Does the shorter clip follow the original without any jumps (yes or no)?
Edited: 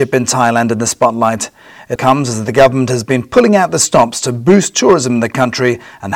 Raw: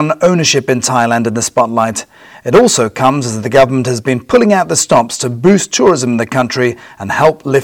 no